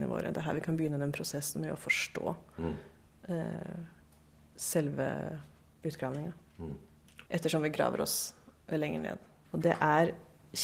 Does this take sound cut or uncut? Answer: cut